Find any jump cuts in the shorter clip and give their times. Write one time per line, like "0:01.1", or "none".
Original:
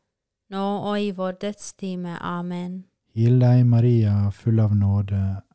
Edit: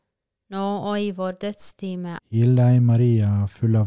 0:02.2